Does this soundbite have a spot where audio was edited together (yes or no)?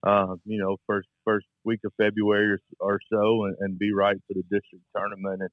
no